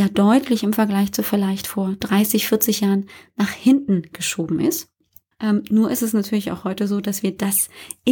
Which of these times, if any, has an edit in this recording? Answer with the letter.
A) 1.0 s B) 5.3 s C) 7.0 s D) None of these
B